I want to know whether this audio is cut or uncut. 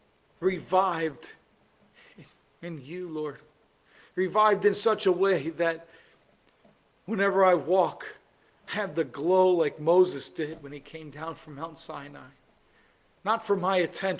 uncut